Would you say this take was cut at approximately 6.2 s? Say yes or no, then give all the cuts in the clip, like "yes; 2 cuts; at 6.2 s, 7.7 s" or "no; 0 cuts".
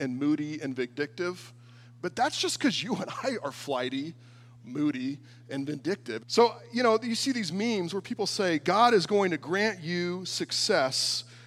yes; 1 cut; at 6.2 s